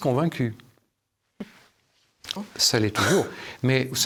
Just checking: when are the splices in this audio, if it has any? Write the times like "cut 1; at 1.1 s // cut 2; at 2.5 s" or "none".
cut 1; at 2.4 s